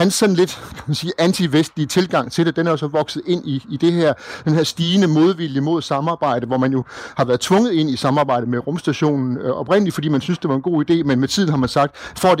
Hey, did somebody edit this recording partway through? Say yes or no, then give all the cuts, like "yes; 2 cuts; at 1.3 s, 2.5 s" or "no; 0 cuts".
no; 0 cuts